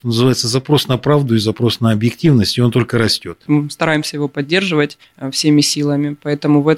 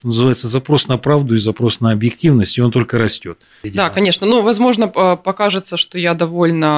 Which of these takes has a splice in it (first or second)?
first